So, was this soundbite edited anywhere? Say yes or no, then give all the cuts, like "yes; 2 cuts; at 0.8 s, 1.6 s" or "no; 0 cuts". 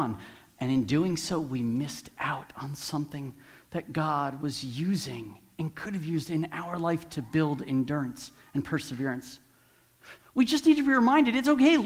yes; 1 cut; at 10.2 s